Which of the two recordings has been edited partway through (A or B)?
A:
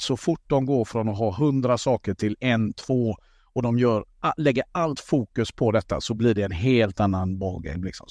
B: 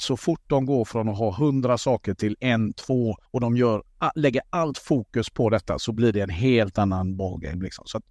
B